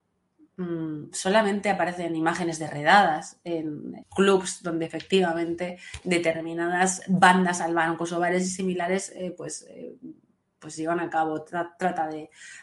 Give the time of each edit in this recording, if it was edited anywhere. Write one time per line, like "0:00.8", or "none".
0:04.0